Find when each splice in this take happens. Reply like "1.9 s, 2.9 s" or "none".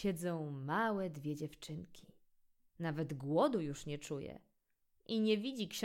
2.7 s